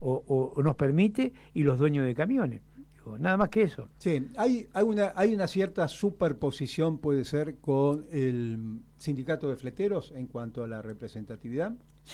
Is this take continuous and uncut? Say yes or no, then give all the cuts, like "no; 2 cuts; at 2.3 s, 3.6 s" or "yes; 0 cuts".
yes; 0 cuts